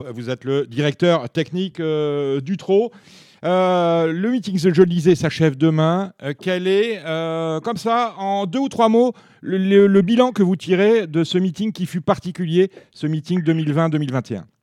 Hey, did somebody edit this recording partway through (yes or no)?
no